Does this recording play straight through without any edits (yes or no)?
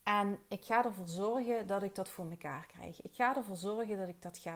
yes